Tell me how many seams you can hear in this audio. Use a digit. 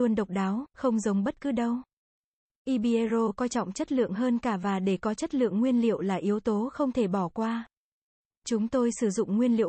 0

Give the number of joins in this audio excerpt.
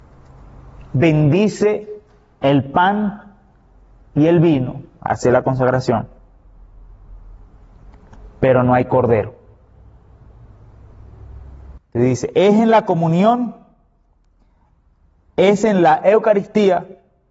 1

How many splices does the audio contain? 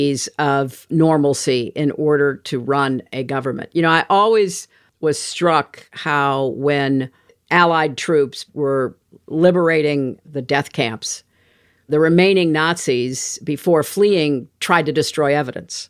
0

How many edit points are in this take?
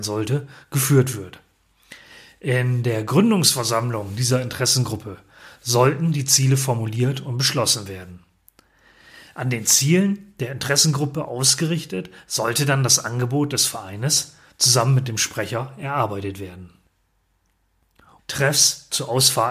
1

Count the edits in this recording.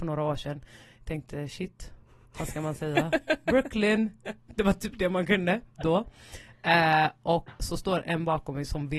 1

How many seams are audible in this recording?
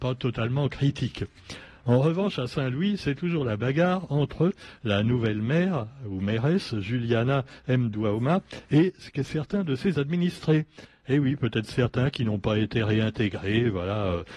0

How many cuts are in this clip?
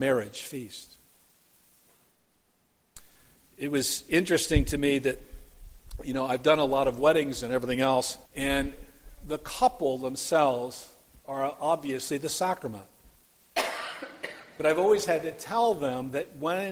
1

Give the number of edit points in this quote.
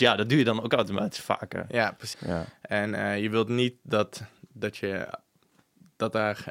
1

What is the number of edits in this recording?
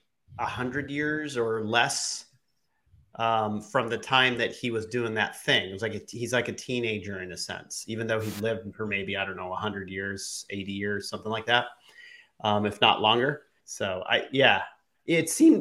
1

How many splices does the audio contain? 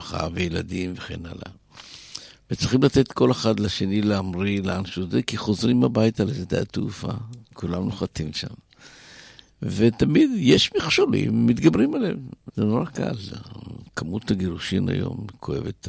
1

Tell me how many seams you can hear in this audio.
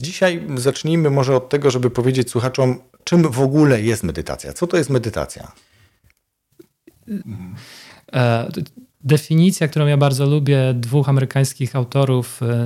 1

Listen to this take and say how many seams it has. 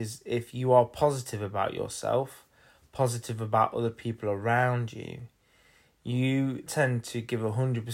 1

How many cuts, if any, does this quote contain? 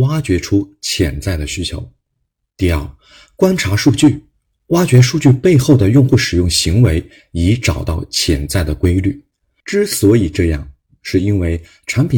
1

